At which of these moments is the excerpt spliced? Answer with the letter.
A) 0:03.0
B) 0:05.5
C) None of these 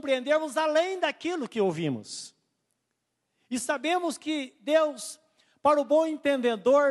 C